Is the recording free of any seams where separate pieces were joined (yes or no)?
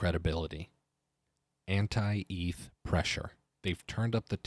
no